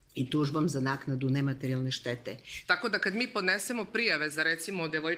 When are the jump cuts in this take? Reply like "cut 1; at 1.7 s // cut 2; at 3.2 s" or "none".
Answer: cut 1; at 2.6 s